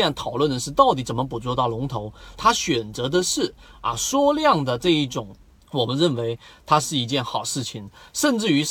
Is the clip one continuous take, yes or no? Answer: no